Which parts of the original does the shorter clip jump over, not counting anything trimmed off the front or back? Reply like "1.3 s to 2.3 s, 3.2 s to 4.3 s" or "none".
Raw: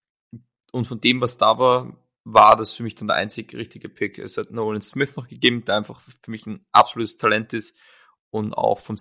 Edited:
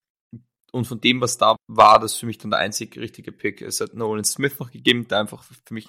1.6 s to 2.1 s